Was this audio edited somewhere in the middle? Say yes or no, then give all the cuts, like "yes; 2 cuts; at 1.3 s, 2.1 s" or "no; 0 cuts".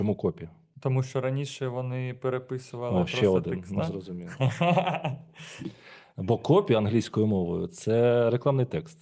no; 0 cuts